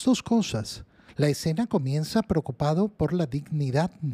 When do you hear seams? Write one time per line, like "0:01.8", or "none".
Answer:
0:01.1